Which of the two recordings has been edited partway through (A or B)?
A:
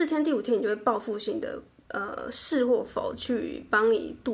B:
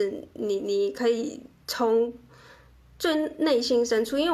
A